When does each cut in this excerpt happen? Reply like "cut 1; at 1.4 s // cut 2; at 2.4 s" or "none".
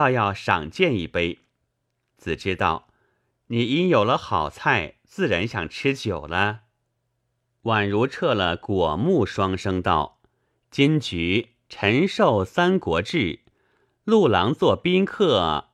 none

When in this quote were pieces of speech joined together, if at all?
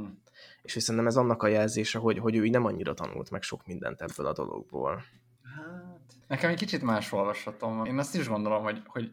cut 1; at 6.2 s // cut 2; at 7.9 s

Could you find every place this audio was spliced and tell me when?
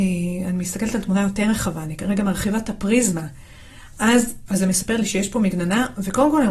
cut 1; at 4.5 s

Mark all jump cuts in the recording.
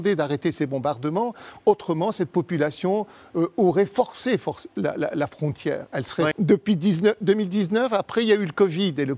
cut 1; at 6.3 s

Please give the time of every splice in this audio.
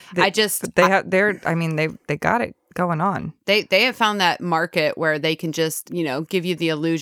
none

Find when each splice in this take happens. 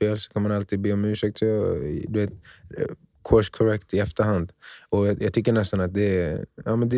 none

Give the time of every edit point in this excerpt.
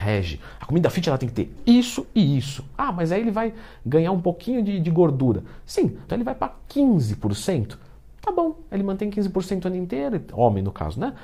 cut 1; at 1.6 s // cut 2; at 2.7 s // cut 3; at 6.1 s

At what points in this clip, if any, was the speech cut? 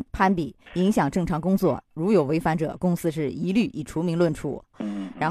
none

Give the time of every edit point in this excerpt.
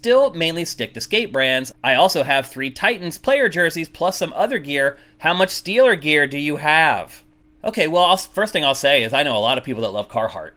none

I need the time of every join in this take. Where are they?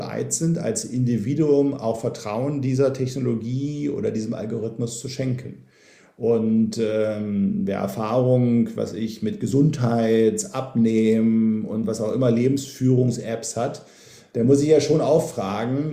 none

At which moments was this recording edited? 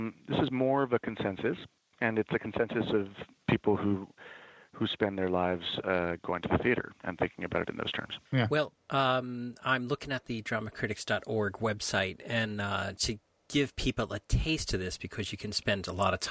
cut 1; at 8.3 s // cut 2; at 13.0 s

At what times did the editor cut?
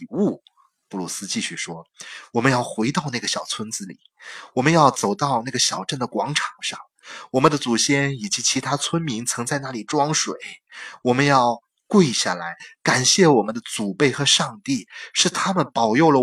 none

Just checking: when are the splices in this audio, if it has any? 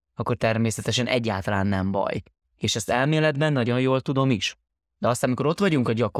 none

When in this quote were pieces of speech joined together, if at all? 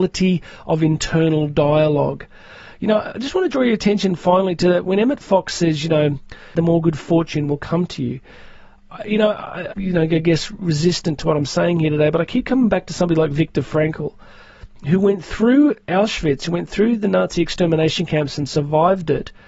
cut 1; at 6.6 s // cut 2; at 9.7 s

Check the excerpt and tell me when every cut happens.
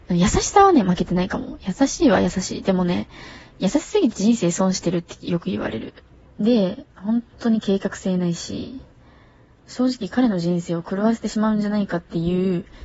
cut 1; at 6.3 s // cut 2; at 9.6 s

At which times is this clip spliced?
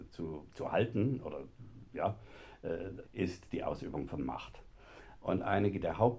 cut 1; at 3.0 s // cut 2; at 5.1 s

